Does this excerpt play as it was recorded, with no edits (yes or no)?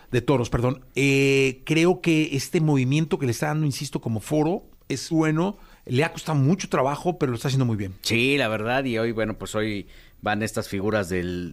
no